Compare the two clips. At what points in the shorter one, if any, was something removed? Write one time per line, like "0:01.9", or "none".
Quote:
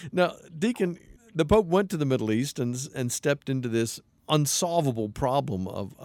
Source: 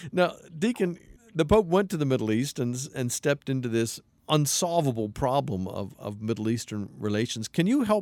none